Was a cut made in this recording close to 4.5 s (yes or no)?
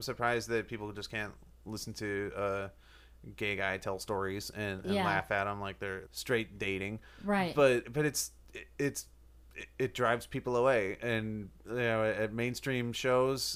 no